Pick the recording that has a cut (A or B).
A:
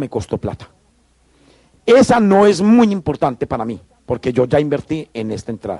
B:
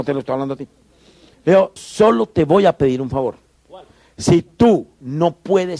B